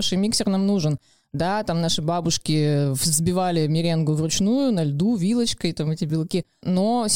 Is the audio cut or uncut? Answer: uncut